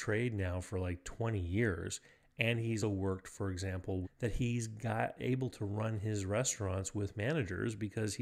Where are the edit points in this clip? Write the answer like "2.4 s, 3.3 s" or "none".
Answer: 2.8 s, 4.0 s